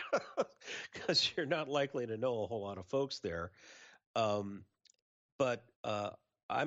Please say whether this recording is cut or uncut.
cut